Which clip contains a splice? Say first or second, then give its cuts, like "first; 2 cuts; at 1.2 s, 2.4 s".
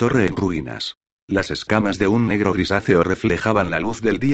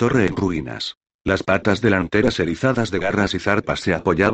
first; 1 cut; at 1.1 s